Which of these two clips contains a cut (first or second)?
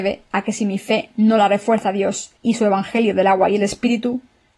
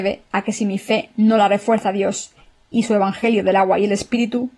first